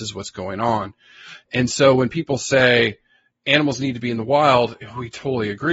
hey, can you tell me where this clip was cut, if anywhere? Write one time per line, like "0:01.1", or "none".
none